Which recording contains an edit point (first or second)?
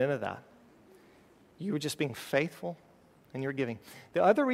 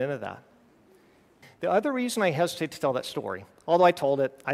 second